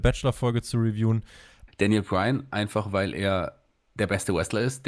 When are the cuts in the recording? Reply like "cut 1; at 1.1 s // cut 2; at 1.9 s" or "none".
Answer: cut 1; at 1.7 s